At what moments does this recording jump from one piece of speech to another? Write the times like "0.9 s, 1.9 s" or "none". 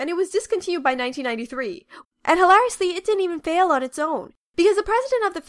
2.0 s, 4.4 s